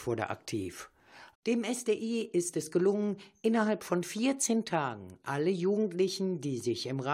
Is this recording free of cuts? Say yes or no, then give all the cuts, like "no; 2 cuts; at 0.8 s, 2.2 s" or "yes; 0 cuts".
no; 1 cut; at 1.3 s